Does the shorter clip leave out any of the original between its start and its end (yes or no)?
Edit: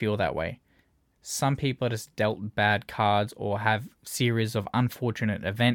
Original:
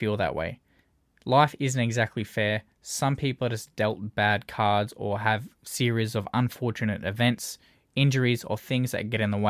yes